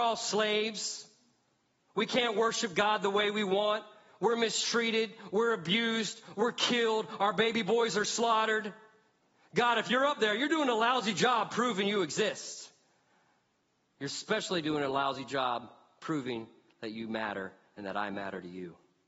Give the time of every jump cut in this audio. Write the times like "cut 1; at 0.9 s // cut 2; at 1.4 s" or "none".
none